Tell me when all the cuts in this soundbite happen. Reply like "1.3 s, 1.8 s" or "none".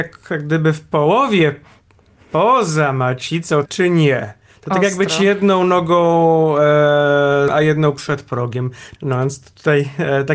3.7 s, 7.5 s, 9.0 s